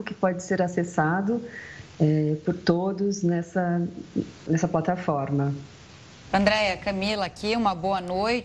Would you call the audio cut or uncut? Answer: cut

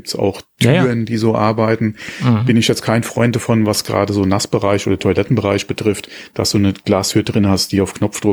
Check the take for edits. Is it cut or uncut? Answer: uncut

